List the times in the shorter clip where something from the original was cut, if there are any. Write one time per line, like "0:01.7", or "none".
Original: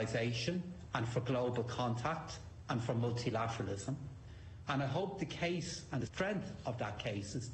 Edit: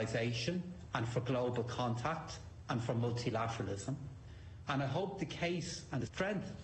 none